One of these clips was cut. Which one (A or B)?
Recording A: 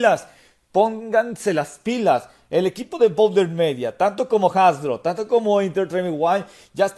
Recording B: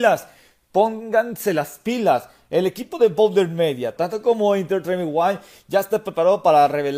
B